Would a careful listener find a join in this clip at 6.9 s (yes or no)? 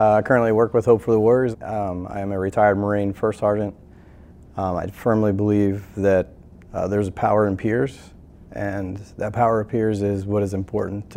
no